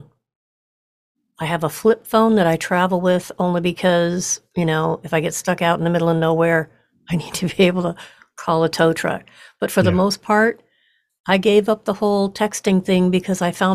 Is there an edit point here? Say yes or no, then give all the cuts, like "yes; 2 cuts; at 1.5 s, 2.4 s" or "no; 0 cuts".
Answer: no; 0 cuts